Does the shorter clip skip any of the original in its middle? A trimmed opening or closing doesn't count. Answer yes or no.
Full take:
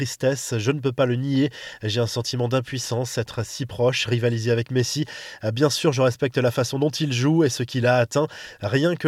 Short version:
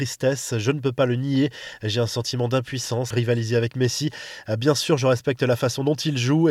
yes